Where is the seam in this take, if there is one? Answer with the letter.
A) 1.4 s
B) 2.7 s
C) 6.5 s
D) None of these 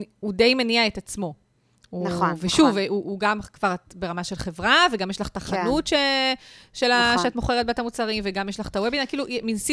D